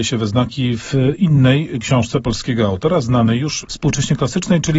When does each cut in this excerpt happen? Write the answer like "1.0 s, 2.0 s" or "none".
3.6 s